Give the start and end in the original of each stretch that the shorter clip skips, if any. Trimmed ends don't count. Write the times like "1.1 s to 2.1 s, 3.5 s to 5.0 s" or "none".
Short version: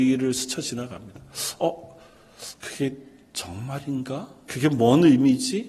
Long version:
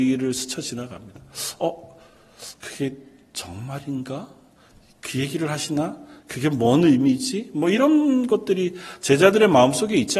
4.4 s to 6.3 s